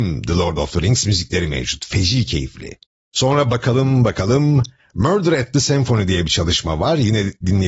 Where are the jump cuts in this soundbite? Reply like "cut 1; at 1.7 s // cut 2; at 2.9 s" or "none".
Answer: none